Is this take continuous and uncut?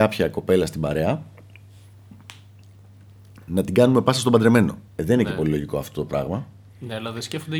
no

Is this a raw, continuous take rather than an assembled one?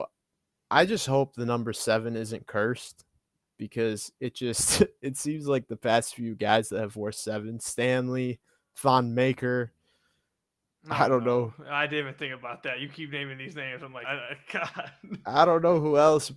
no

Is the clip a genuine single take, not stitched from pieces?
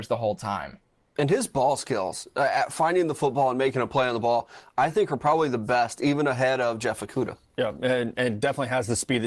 yes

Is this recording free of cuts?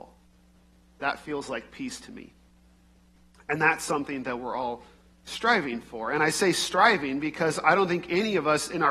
yes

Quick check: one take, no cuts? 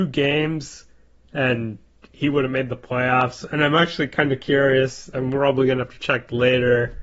yes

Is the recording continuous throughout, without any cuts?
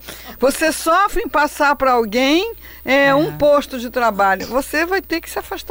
yes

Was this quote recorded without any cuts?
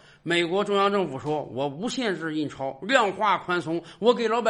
yes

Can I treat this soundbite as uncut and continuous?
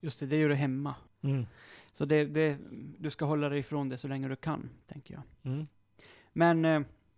no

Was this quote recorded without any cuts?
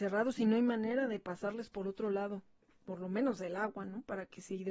yes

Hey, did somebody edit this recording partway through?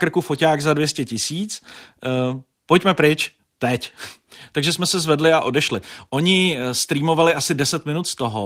no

